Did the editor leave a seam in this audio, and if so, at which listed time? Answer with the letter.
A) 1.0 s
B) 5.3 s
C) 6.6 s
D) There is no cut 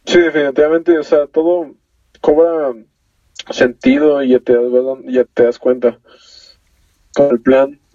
B